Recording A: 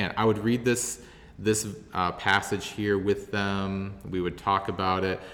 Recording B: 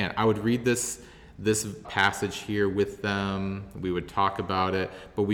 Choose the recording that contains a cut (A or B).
B